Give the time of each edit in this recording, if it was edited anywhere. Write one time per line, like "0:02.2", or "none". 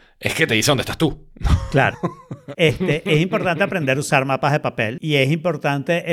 0:02.5